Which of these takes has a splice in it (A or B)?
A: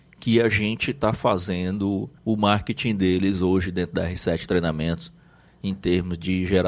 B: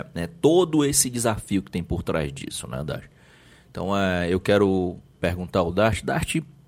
A